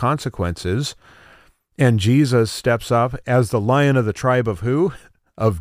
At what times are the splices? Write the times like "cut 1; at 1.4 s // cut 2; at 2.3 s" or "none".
none

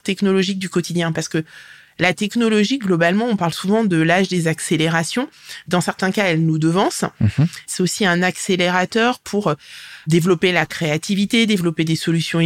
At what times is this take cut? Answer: none

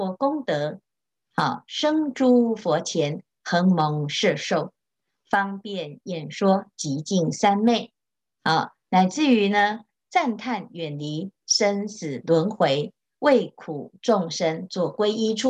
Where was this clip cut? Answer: none

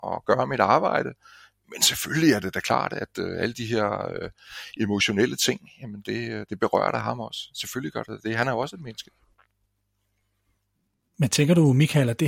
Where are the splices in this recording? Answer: none

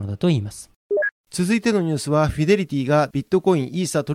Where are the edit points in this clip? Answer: none

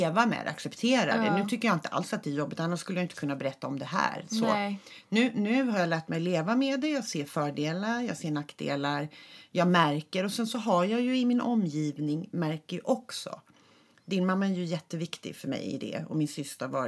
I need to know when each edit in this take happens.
none

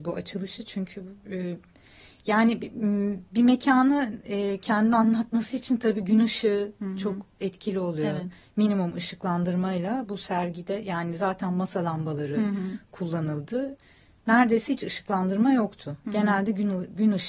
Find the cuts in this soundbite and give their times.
none

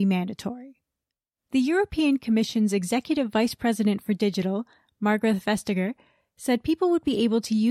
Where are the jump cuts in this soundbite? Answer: none

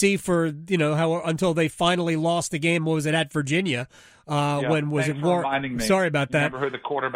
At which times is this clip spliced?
none

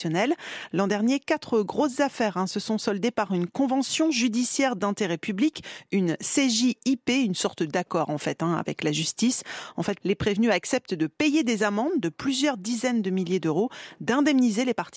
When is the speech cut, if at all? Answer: cut 1; at 10.0 s

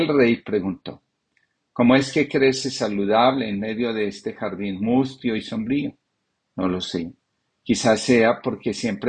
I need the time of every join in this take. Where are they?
none

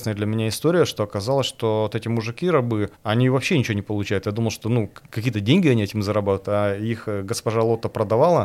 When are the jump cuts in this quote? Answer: cut 1; at 2.9 s

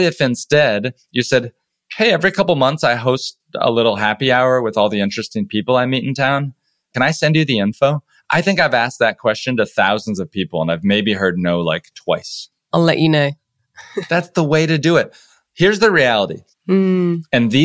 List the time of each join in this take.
cut 1; at 12.7 s // cut 2; at 16.5 s

